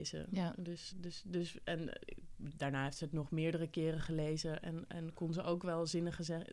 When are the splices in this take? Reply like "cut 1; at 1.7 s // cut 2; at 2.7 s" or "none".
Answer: cut 1; at 0.9 s